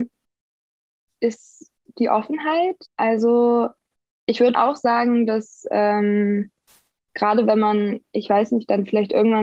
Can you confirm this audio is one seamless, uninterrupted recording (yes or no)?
no